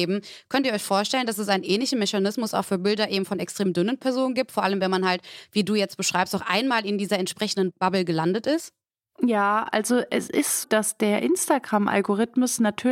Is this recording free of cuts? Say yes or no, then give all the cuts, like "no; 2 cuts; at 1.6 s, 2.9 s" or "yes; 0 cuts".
no; 1 cut; at 10.6 s